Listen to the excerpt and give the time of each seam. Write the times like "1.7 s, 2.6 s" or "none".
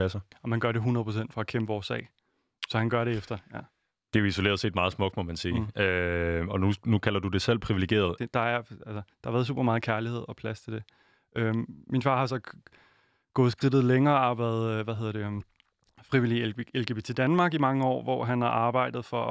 8.2 s